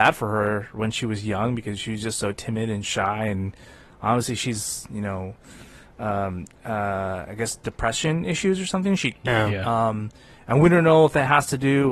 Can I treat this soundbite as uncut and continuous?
no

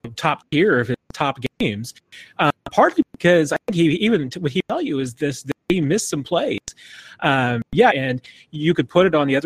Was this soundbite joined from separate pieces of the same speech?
yes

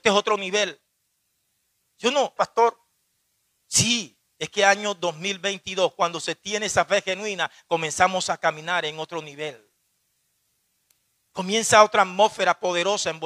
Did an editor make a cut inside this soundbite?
yes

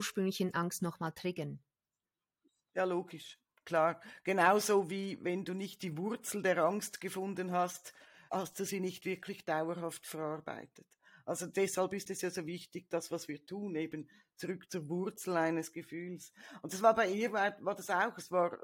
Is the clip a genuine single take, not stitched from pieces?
no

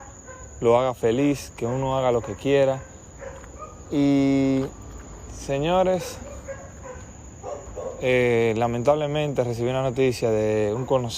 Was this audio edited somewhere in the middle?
no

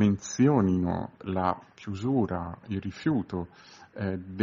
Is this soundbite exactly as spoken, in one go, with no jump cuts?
no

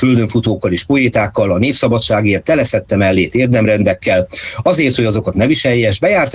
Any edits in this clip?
no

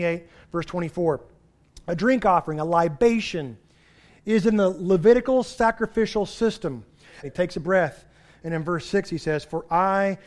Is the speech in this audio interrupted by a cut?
yes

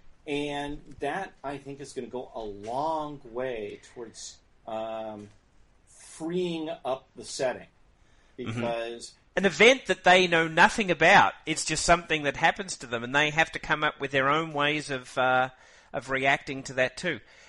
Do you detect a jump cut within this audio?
yes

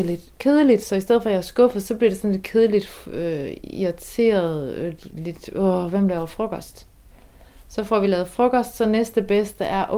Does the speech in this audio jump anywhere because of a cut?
no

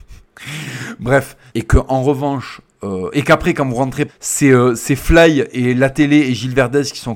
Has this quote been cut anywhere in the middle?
yes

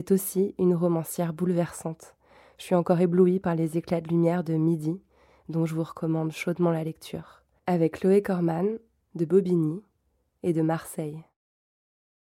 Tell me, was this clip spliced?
yes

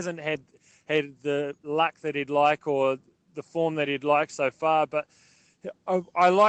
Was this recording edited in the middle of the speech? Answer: no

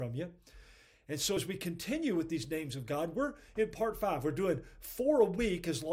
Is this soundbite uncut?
yes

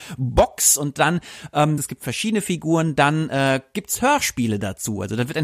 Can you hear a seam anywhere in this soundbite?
yes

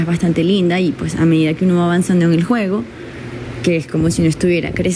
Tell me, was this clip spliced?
no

